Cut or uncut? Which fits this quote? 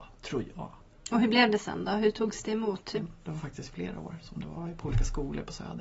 cut